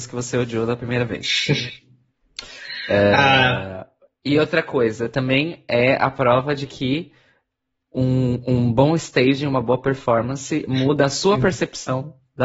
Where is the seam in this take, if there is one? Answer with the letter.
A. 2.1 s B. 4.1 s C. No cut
C